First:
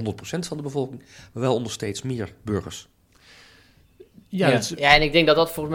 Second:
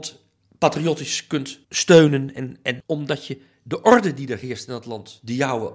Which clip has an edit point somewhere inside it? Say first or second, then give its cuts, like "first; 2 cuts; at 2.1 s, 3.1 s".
second; 2 cuts; at 1.6 s, 2.8 s